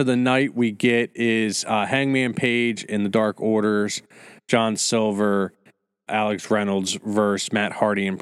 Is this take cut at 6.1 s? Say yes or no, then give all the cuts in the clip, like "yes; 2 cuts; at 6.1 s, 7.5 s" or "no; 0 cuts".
yes; 1 cut; at 6.1 s